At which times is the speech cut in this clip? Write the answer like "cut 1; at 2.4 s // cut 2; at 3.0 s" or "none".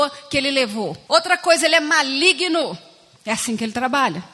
cut 1; at 1.1 s // cut 2; at 3.2 s